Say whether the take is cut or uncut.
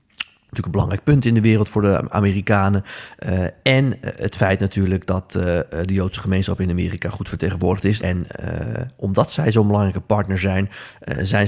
cut